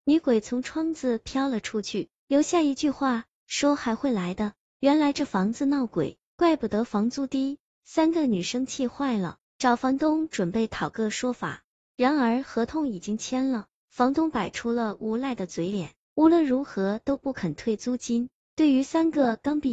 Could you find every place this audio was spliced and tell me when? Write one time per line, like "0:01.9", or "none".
none